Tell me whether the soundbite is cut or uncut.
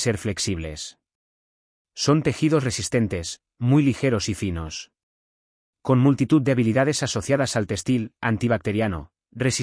cut